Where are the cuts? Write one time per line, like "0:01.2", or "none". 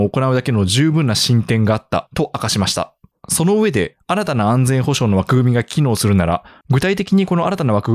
0:03.1
0:06.6

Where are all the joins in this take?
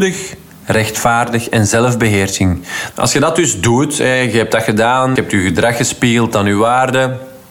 0:02.9
0:05.2

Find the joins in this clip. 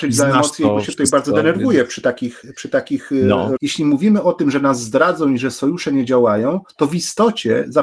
0:03.6

